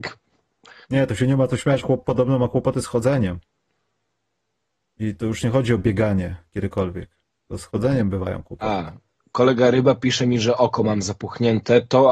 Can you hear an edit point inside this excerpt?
no; 0 cuts

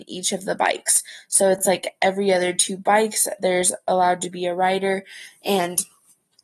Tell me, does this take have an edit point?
no; 0 cuts

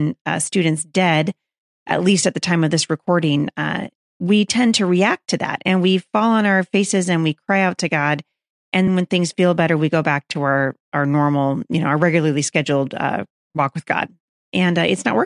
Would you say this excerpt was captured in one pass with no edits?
no; 1 cut; at 8.9 s

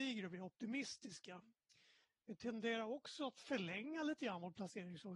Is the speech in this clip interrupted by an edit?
no; 0 cuts

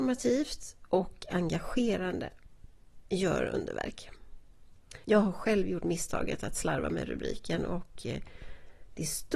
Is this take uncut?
no; 1 cut; at 5.0 s

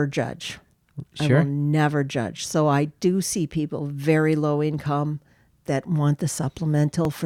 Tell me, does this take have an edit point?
no; 0 cuts

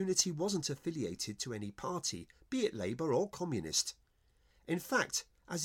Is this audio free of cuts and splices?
yes; 0 cuts

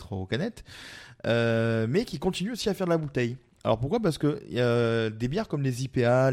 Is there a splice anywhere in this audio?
no; 0 cuts

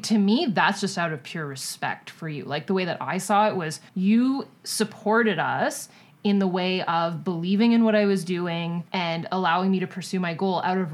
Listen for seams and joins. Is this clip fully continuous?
no; 2 cuts; at 3.9 s, 8.9 s

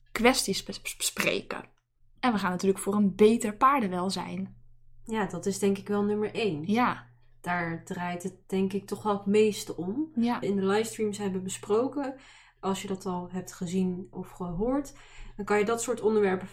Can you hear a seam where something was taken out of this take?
yes; 2 cuts; at 10.4 s, 14.1 s

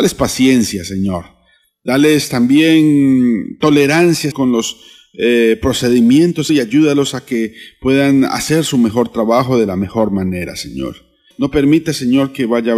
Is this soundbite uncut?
no; 3 cuts; at 4.3 s, 6.5 s, 11.3 s

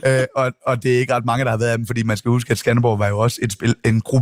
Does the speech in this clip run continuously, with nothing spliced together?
yes; 0 cuts

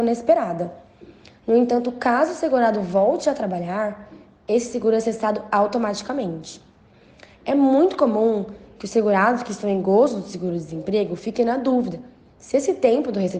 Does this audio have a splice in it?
no; 0 cuts

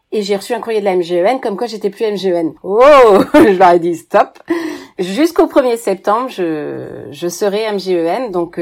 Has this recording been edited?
no; 0 cuts

